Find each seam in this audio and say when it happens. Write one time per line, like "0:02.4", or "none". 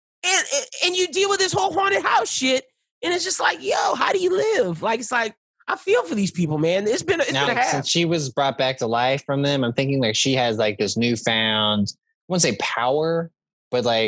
0:07.5